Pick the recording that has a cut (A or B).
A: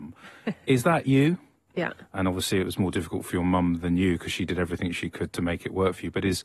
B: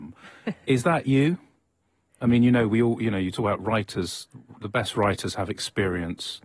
A